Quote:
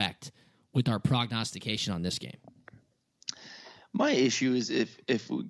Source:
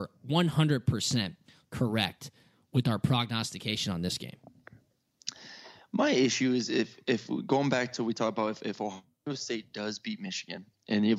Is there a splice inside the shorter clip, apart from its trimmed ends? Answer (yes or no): no